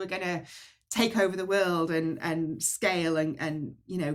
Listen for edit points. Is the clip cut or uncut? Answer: uncut